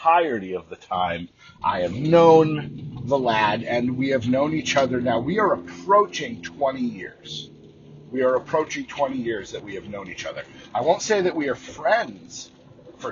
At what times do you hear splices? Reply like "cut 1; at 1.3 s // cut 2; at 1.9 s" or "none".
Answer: none

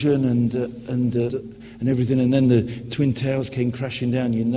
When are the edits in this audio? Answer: cut 1; at 1.3 s

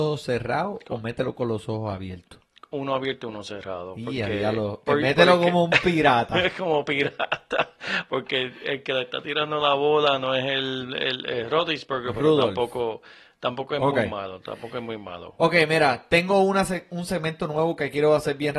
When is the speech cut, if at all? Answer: none

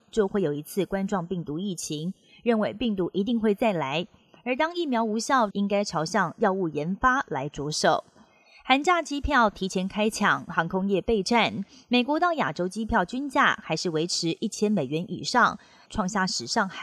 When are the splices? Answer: cut 1; at 5.5 s // cut 2; at 15.9 s

